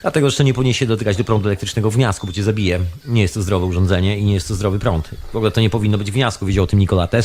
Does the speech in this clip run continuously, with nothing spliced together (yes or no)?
yes